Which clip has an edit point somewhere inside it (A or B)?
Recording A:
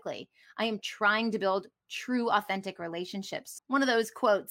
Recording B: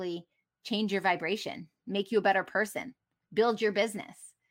A